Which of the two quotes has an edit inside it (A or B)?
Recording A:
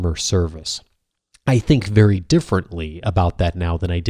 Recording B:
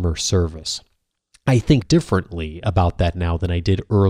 B